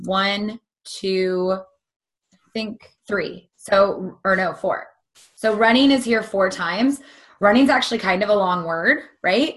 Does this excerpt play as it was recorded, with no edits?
no; 1 cut; at 3.0 s

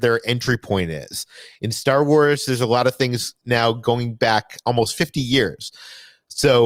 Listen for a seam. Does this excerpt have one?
no; 0 cuts

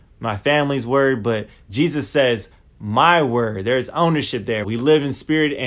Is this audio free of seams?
no; 1 cut; at 4.6 s

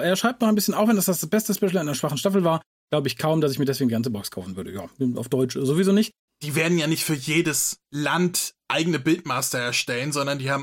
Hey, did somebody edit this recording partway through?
yes; 2 cuts; at 6.3 s, 7.9 s

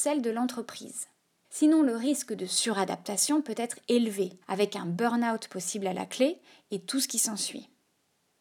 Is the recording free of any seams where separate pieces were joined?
no; 2 cuts; at 1.4 s, 4.4 s

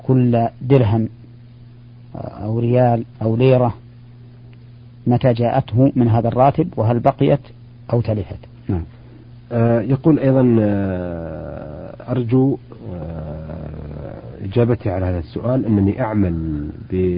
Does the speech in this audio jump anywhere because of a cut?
yes; 2 cuts; at 3.1 s, 8.6 s

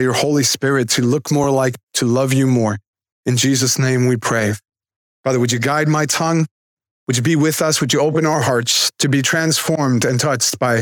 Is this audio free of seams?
yes; 0 cuts

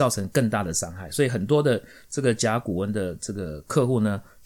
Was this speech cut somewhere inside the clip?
no; 0 cuts

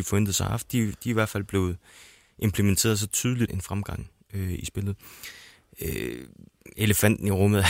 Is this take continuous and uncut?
no; 2 cuts; at 3.5 s, 6.7 s

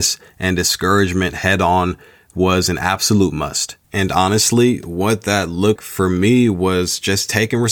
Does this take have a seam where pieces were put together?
yes; 2 cuts; at 3.8 s, 5.8 s

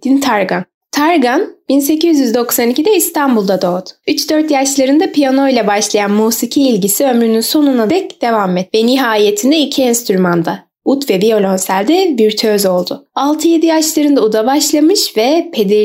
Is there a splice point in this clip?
no; 0 cuts

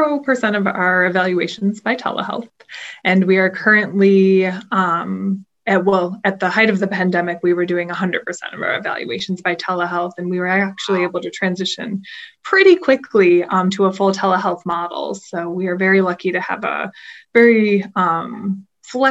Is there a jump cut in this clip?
no; 0 cuts

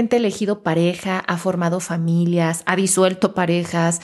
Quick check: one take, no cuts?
yes; 0 cuts

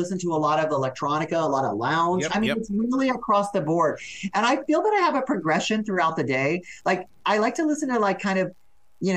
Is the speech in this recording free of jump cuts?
no; 2 cuts; at 2.3 s, 7.2 s

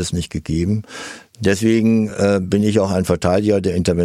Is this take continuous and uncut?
yes; 0 cuts

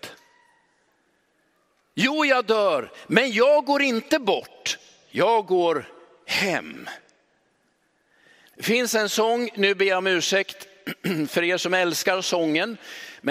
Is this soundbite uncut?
yes; 0 cuts

